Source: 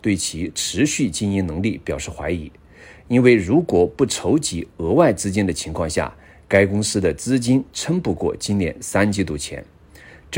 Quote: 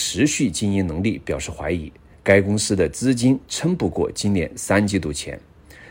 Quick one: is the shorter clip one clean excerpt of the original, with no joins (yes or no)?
no